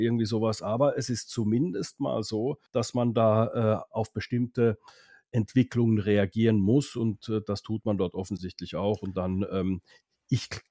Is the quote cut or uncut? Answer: cut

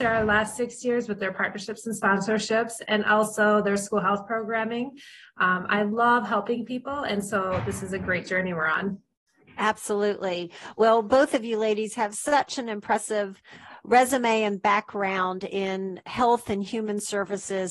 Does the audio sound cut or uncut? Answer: uncut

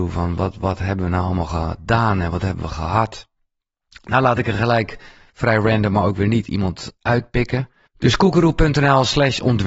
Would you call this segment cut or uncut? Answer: cut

